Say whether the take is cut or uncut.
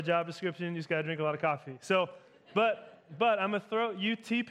uncut